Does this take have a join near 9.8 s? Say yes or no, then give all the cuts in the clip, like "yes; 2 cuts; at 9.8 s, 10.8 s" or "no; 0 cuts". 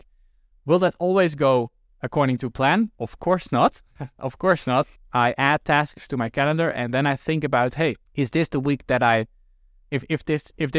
no; 2 cuts; at 5.0 s, 8.0 s